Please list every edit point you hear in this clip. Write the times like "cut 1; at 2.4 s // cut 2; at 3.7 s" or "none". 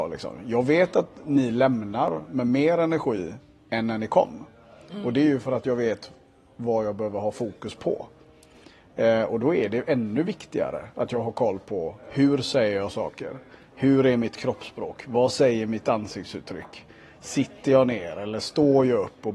none